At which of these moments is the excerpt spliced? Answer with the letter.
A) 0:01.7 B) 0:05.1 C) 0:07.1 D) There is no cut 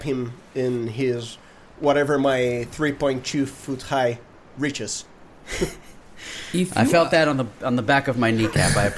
D